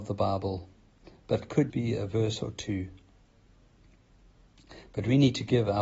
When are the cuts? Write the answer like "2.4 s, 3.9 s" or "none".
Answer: 1.7 s